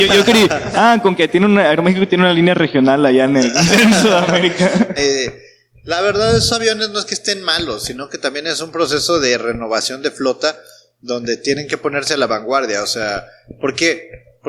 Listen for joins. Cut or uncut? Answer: cut